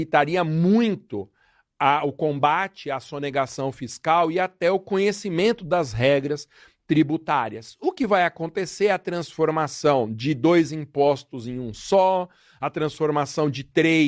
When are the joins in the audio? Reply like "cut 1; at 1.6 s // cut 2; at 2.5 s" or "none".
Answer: none